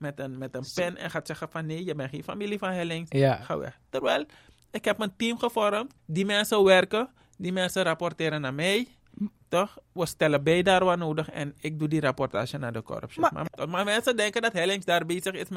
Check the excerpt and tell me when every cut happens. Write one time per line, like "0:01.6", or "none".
0:06.0
0:13.5